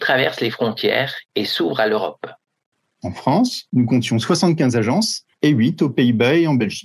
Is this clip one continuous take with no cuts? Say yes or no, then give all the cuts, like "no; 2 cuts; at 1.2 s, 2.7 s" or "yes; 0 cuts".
no; 2 cuts; at 2.9 s, 5.3 s